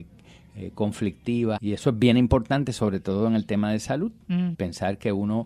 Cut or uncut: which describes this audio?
cut